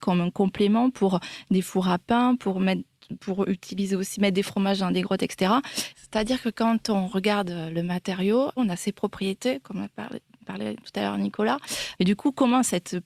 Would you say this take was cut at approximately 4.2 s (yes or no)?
no